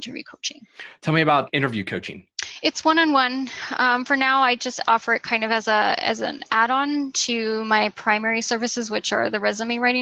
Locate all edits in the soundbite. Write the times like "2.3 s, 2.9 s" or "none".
none